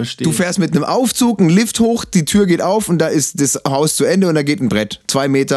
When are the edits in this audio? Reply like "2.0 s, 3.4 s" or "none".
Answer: none